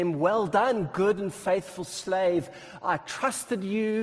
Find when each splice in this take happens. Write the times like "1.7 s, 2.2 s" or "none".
none

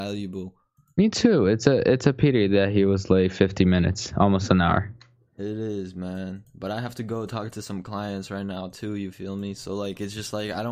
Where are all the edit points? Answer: none

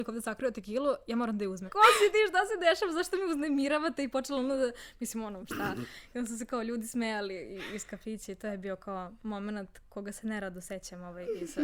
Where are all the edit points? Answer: 1.7 s, 5.4 s

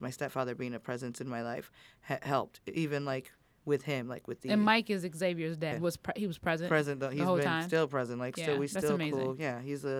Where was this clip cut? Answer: 5.7 s

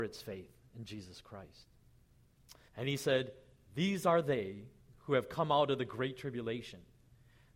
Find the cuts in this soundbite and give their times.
2.7 s

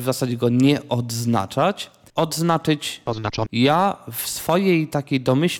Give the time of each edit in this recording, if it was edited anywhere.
2.1 s, 3.5 s

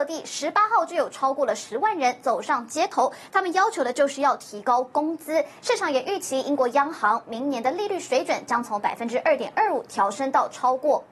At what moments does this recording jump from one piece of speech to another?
5.6 s

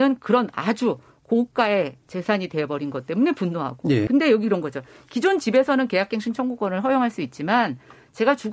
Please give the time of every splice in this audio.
4.1 s

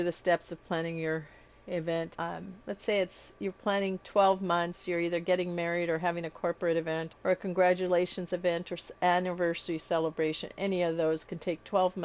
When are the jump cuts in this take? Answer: 2.1 s, 7.1 s

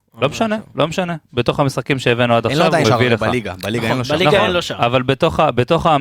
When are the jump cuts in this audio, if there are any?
2.8 s

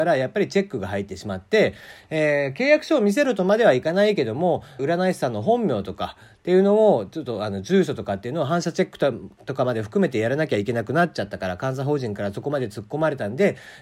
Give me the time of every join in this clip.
4.8 s

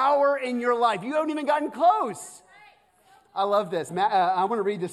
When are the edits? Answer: 3.9 s

